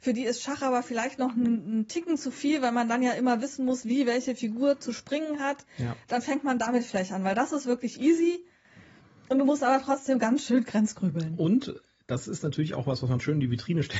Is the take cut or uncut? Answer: uncut